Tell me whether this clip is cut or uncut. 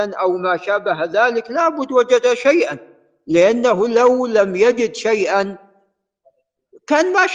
uncut